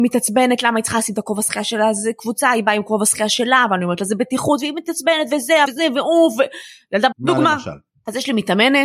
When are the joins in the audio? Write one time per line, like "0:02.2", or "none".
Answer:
0:05.7
0:07.1